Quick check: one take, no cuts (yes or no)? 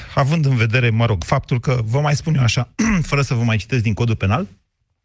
yes